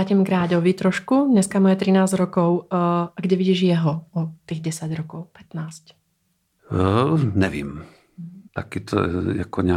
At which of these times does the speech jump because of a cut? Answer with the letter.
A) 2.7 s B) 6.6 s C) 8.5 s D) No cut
C